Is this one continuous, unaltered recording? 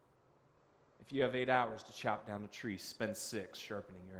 yes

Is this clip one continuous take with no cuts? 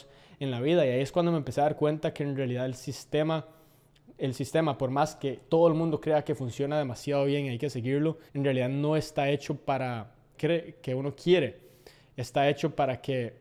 no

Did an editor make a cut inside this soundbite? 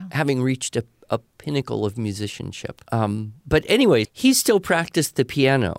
yes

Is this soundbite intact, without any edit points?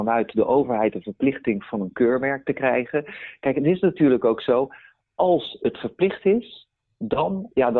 yes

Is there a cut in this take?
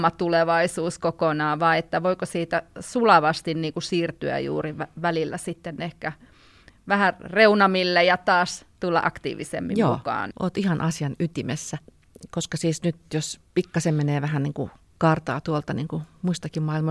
yes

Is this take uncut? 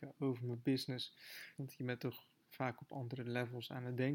no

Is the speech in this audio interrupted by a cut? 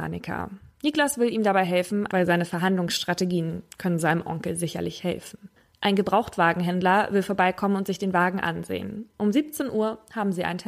yes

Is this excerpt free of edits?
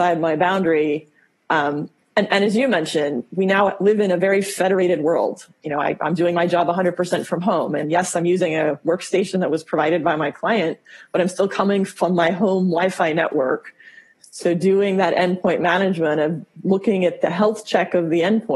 no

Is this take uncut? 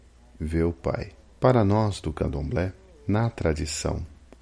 yes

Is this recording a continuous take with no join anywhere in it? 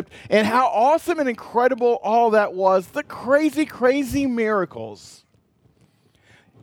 yes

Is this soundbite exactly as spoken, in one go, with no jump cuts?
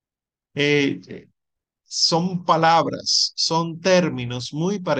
yes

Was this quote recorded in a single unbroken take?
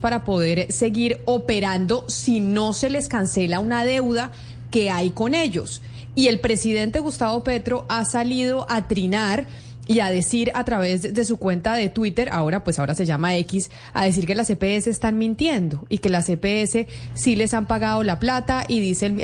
yes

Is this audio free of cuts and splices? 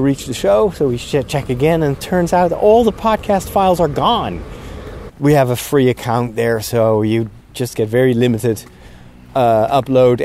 no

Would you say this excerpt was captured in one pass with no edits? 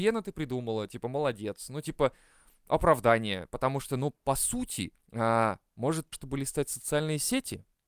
no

